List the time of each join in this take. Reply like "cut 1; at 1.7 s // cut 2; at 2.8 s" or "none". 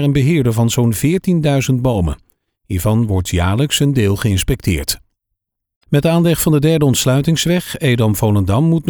none

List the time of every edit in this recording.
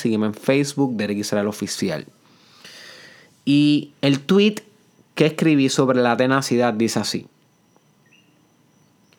none

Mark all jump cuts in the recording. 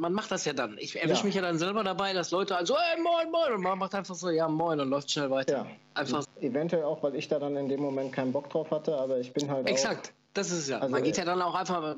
cut 1; at 6.2 s // cut 2; at 10.2 s

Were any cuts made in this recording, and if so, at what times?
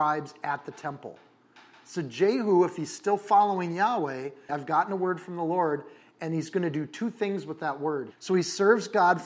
cut 1; at 4.5 s // cut 2; at 8.1 s

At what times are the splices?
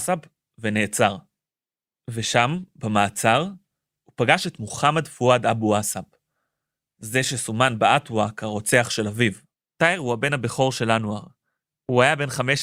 cut 1; at 9.5 s

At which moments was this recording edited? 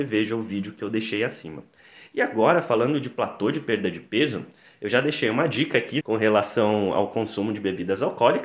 cut 1; at 6.0 s

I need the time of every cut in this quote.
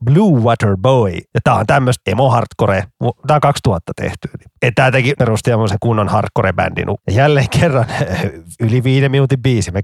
cut 1; at 5.2 s // cut 2; at 7.0 s

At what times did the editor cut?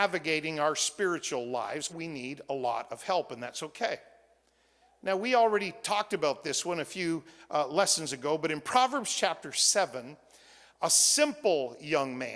cut 1; at 1.9 s

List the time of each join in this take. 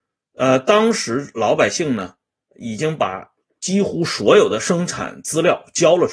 none

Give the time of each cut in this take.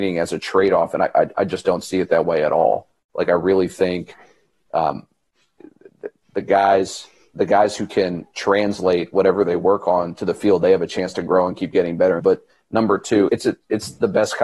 cut 1; at 12.2 s // cut 2; at 13.3 s

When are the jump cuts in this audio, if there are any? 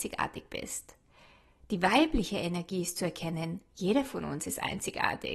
none

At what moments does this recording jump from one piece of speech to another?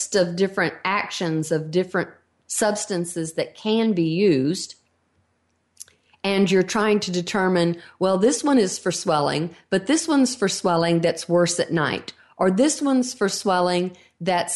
none

